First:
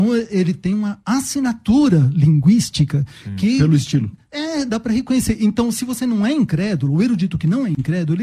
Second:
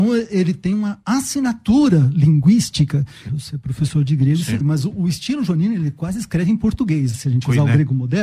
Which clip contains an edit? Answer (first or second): second